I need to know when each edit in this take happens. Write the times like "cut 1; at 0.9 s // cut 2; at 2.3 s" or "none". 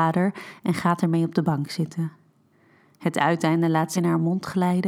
cut 1; at 3.9 s

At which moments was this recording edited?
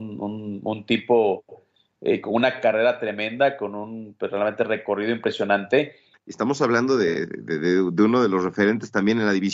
cut 1; at 6.1 s

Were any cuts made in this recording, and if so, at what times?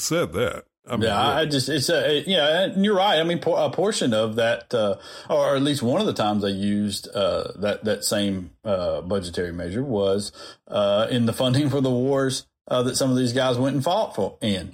none

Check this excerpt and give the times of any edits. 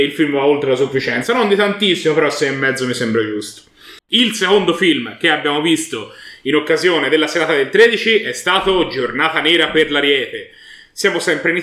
cut 1; at 4.0 s

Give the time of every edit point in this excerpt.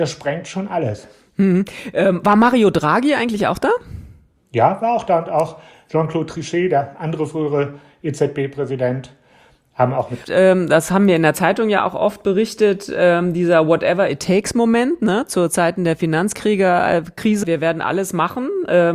cut 1; at 10.2 s // cut 2; at 17.4 s

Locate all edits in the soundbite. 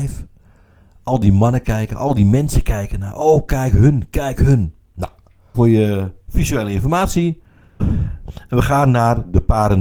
cut 1; at 5.5 s // cut 2; at 7.8 s

